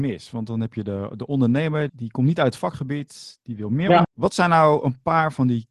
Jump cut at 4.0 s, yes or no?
yes